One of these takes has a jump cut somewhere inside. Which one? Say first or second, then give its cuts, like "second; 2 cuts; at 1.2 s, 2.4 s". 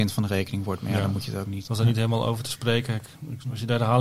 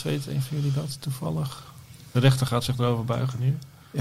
first; 1 cut; at 1.6 s